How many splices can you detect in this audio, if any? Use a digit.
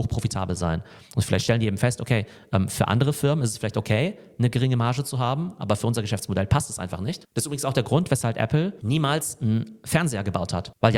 0